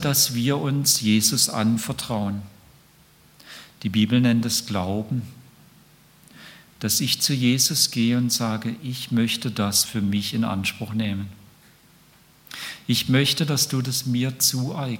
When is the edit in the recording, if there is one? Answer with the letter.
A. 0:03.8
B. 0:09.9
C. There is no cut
B